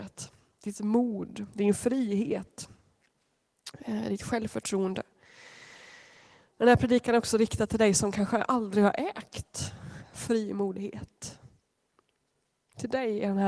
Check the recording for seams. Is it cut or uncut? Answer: uncut